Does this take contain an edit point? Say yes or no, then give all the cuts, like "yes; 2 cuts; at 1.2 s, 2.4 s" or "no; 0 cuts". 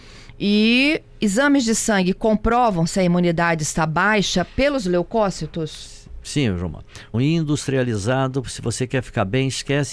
yes; 1 cut; at 7.1 s